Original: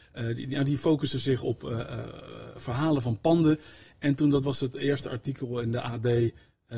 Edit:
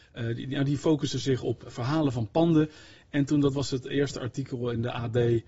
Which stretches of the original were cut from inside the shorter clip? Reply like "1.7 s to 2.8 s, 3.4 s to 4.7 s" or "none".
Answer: 1.6 s to 2.5 s